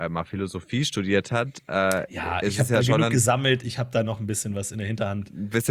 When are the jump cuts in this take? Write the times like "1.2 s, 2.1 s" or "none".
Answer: none